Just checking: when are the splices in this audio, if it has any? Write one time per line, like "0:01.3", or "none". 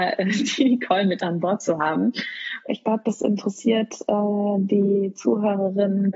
0:02.7